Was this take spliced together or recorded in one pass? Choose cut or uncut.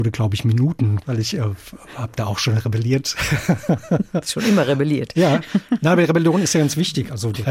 cut